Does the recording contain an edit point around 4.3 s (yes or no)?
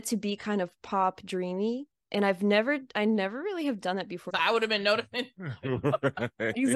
yes